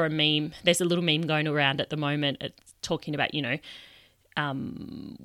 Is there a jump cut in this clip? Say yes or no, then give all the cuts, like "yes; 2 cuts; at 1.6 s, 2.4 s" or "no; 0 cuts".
no; 0 cuts